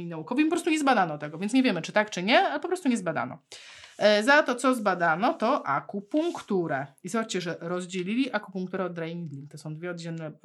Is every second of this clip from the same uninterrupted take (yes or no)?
yes